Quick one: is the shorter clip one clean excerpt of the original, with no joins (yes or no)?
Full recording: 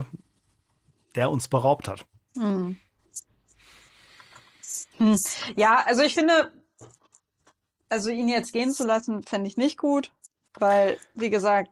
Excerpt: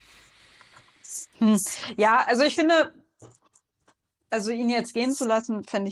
yes